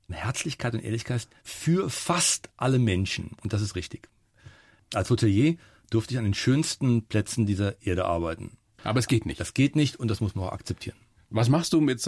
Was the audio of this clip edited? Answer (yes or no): yes